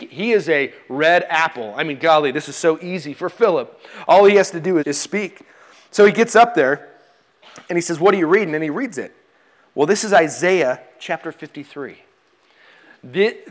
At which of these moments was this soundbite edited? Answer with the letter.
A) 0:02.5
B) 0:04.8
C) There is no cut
B